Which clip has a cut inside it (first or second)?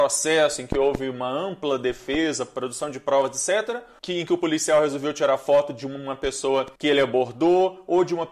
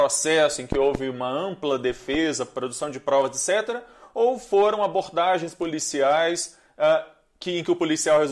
first